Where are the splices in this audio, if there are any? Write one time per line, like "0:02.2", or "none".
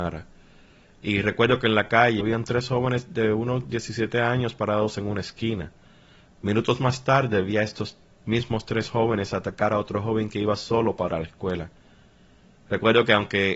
0:02.2